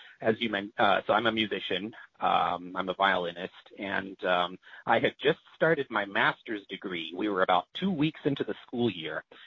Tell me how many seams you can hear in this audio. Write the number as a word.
zero